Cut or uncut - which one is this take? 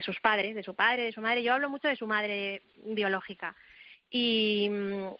uncut